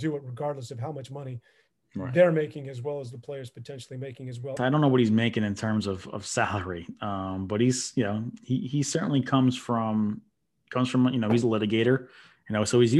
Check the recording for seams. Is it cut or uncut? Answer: cut